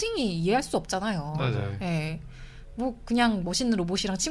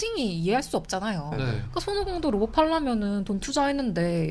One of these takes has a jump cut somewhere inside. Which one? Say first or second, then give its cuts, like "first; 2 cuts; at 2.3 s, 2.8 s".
second; 1 cut; at 1.3 s